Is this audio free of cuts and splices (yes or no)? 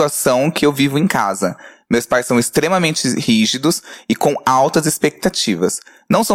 yes